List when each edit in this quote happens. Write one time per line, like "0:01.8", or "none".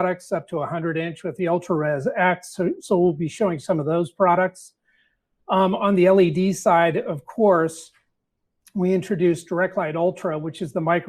none